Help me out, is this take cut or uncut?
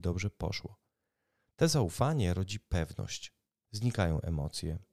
cut